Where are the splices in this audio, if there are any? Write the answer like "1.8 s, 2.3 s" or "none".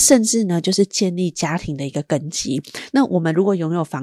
2.9 s